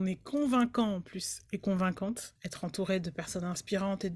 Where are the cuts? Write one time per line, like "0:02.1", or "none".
0:02.4